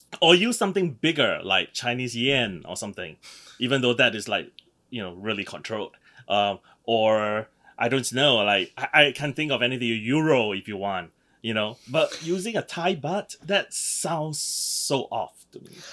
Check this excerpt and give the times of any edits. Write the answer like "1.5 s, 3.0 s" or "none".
none